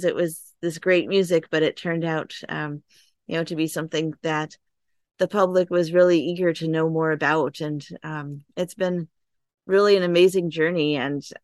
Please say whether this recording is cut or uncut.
uncut